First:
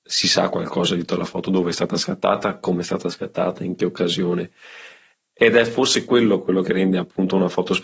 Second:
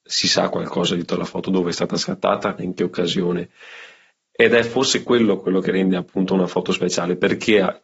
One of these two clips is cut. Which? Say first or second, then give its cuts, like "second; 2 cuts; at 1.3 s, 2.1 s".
second; 1 cut; at 2.6 s